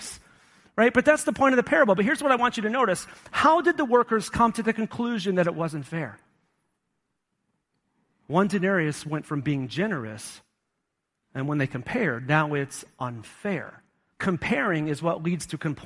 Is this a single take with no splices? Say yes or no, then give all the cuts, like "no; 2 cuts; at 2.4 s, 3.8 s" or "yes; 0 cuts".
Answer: no; 2 cuts; at 8.1 s, 14.1 s